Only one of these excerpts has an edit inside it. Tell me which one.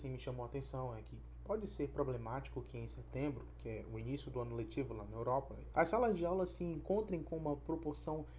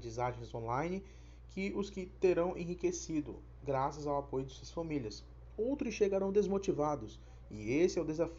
first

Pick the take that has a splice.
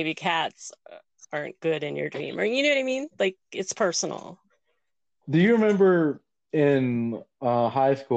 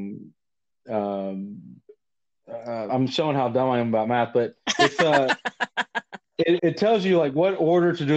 second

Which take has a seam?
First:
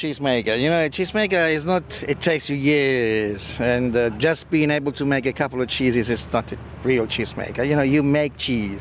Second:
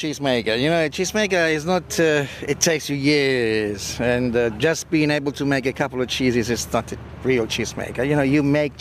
first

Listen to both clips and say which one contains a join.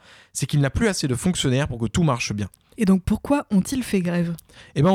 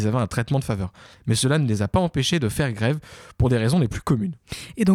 first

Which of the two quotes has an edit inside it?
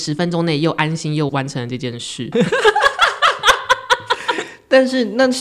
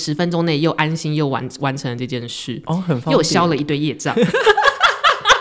first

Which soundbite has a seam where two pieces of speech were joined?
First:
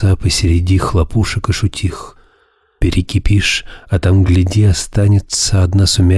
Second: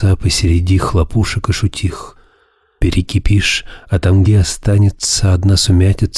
second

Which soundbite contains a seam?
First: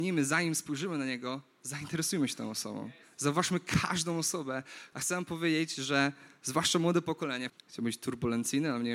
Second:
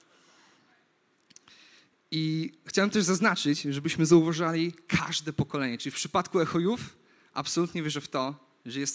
first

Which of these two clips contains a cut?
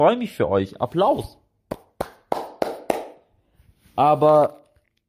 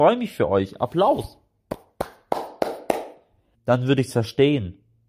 second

